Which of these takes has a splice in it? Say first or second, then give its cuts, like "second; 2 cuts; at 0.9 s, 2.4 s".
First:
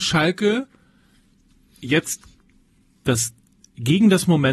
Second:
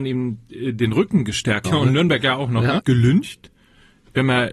second; 2 cuts; at 1.6 s, 2.8 s